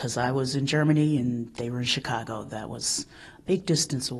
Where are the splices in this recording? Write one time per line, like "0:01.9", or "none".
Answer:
none